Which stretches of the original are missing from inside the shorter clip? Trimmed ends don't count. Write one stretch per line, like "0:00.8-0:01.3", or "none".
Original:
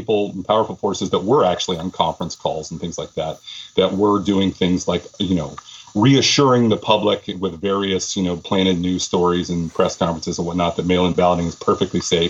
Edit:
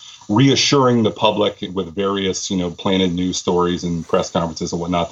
none